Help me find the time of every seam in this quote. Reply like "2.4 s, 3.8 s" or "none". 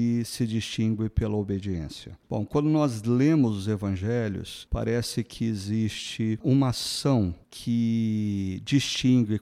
2.2 s